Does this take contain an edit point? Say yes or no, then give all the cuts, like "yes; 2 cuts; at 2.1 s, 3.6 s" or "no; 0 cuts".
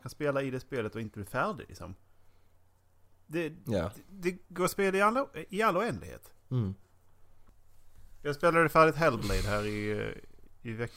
yes; 1 cut; at 6.4 s